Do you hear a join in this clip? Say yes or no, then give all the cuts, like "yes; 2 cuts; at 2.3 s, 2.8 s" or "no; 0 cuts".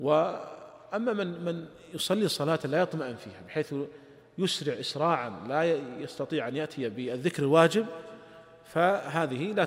no; 0 cuts